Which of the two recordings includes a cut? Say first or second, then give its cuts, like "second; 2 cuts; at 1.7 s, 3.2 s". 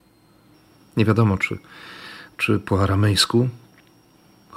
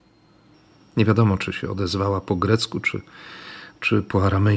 first; 1 cut; at 1.4 s